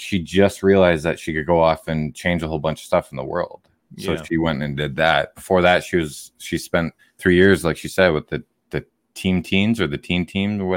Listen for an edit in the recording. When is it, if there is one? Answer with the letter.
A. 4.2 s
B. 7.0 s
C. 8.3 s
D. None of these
B